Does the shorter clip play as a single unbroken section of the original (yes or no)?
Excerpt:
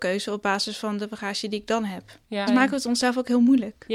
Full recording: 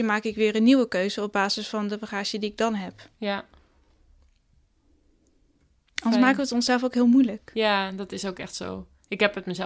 no